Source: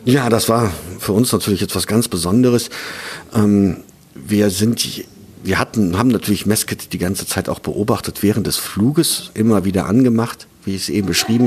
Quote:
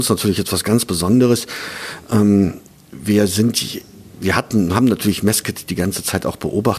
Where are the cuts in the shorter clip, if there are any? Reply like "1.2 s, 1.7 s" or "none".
none